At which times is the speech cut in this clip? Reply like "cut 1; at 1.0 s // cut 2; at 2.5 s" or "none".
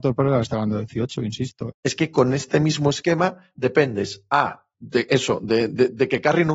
cut 1; at 1.7 s // cut 2; at 4.7 s